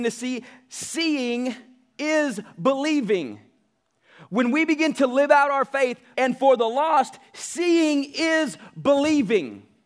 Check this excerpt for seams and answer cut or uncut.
cut